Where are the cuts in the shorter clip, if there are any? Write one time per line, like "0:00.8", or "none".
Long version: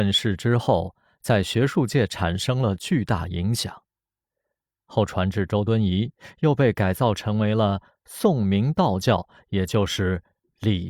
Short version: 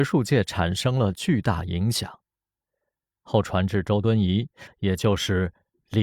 0:04.7